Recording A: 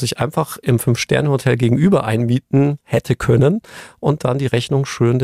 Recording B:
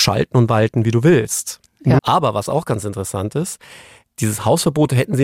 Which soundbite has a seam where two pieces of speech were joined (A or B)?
B